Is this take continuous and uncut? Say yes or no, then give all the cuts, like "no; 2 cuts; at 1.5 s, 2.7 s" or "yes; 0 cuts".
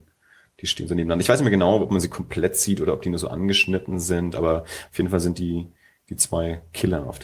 yes; 0 cuts